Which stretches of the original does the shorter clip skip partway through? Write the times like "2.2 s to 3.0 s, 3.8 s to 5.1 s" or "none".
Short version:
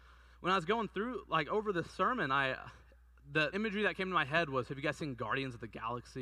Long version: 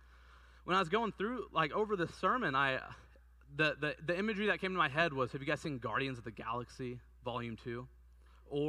3.8 s to 4.2 s